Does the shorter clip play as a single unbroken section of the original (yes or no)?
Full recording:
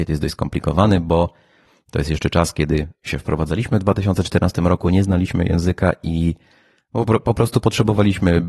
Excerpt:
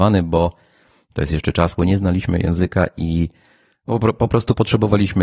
no